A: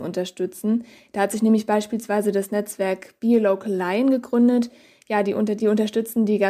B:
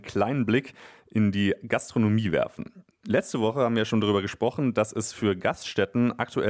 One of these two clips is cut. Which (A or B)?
A